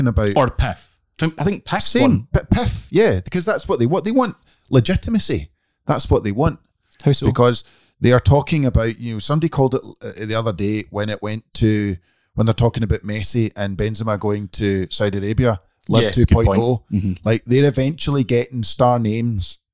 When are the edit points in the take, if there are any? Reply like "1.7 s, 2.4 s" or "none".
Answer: 6.9 s